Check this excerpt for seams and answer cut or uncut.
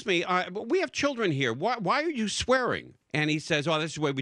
cut